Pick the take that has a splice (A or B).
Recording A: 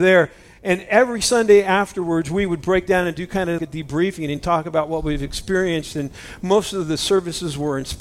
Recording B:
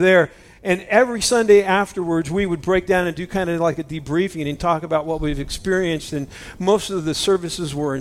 A